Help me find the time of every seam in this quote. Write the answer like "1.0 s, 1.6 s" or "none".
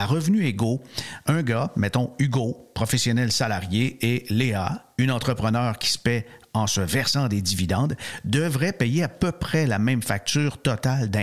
none